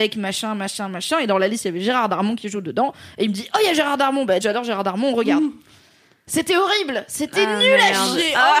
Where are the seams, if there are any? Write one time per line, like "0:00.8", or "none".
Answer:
0:04.4